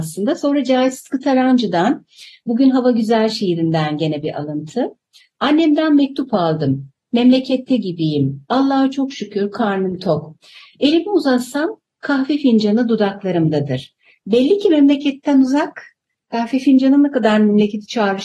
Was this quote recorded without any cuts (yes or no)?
yes